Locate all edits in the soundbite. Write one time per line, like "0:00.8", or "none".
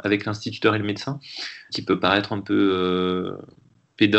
0:01.7